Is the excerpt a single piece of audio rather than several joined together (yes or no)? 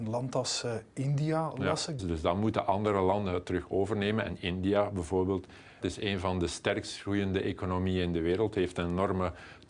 no